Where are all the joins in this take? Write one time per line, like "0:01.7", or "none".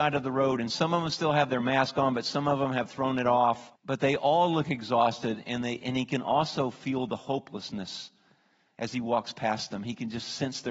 0:03.8